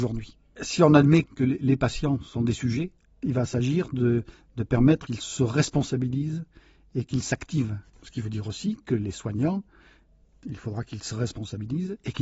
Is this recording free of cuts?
no; 1 cut; at 1.2 s

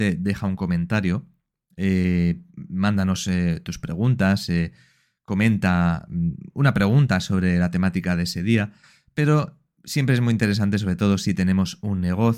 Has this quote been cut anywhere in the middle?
no; 0 cuts

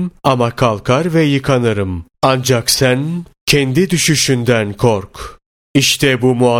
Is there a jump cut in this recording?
yes; 1 cut; at 2.1 s

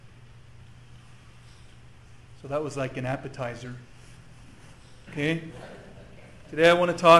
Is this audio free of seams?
no; 1 cut; at 5.1 s

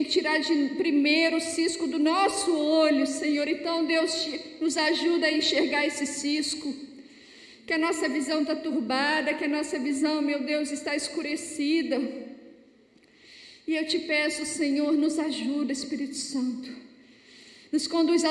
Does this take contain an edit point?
no; 0 cuts

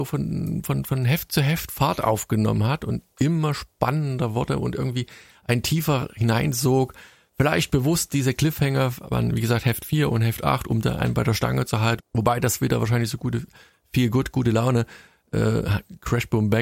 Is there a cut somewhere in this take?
yes; 1 cut; at 12.0 s

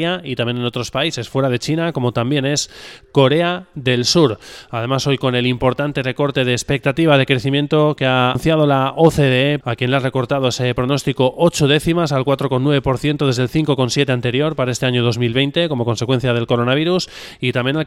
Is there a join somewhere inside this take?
yes; 2 cuts; at 8.4 s, 9.6 s

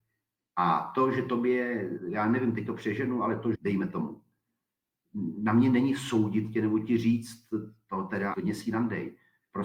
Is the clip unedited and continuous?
no; 2 cuts; at 3.5 s, 8.3 s

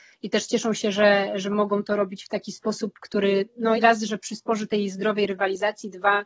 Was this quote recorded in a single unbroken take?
no; 1 cut; at 3.8 s

